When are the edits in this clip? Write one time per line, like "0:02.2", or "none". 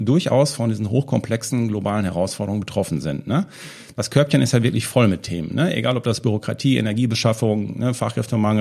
none